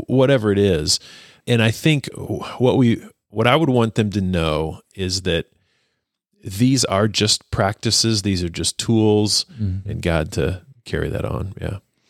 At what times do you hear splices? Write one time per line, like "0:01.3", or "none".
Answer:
0:09.8